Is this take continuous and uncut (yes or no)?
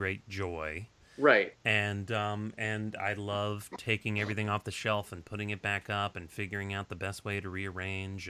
yes